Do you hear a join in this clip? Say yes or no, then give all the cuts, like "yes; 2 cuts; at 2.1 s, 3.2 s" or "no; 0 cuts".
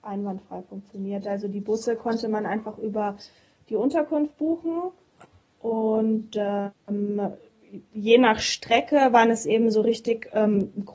no; 0 cuts